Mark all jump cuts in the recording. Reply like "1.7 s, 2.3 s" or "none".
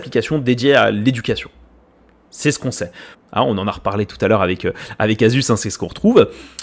3.1 s

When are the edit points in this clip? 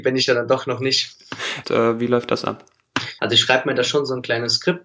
1.6 s, 3.2 s

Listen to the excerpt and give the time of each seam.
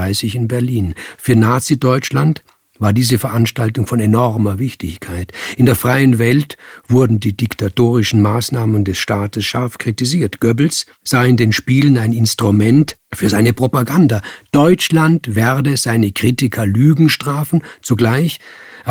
none

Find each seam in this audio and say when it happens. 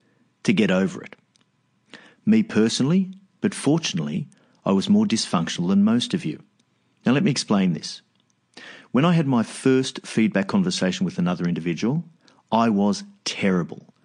3.4 s

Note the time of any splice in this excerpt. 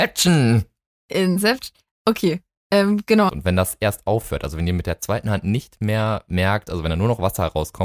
3.3 s, 6.7 s

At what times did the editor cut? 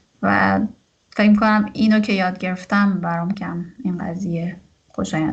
3.3 s

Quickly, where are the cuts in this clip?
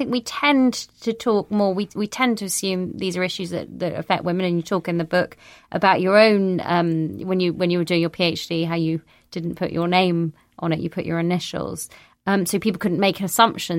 none

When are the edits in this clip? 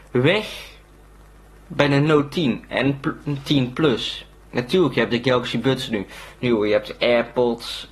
4.5 s

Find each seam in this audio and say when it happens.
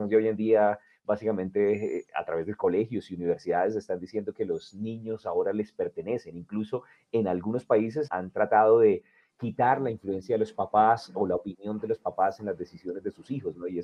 8.1 s

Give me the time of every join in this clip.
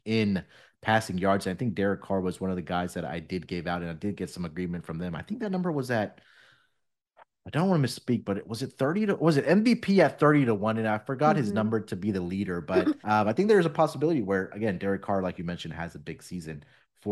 13.0 s

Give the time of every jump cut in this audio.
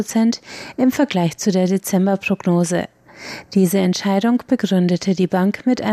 3.5 s

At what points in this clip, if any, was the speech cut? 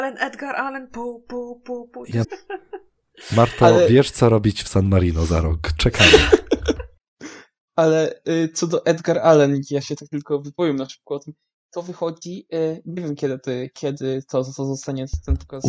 2.2 s

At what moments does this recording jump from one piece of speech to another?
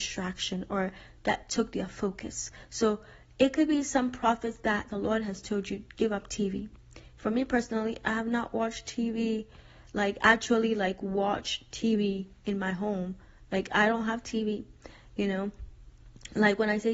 none

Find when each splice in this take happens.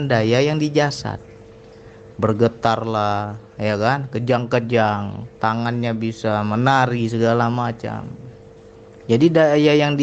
2.1 s, 5.4 s, 9.0 s

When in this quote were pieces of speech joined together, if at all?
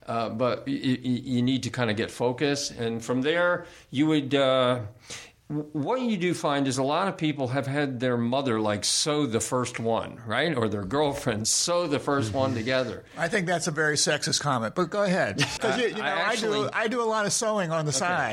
15.6 s

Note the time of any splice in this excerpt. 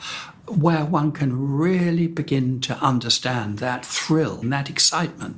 4.4 s

